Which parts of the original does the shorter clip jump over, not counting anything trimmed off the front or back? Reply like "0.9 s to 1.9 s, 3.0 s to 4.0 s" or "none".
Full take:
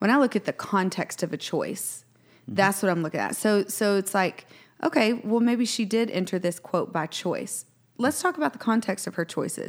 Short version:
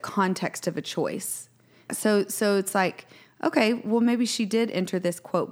2.5 s to 3.3 s